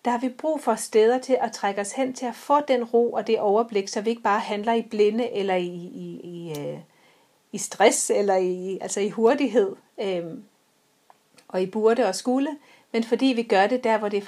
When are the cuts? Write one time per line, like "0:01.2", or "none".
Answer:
none